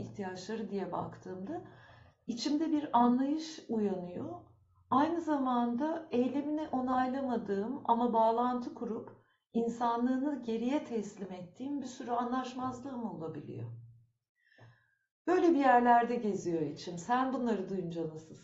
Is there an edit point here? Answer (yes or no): no